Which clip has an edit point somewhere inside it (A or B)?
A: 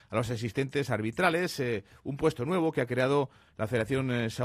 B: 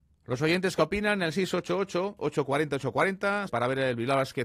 B